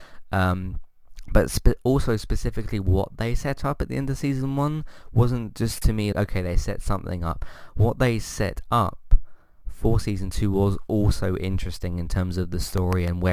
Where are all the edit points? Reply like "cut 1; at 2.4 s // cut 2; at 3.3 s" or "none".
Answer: cut 1; at 6.1 s